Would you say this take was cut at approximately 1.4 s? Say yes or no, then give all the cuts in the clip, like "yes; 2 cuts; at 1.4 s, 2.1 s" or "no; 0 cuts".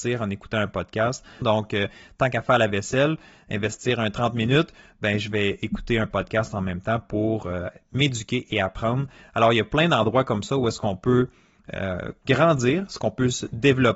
yes; 1 cut; at 1.4 s